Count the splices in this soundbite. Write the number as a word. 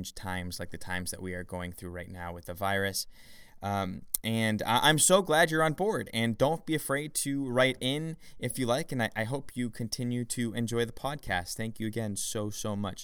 zero